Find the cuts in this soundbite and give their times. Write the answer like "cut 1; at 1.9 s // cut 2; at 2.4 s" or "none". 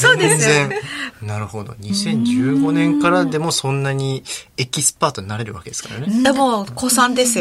cut 1; at 1.1 s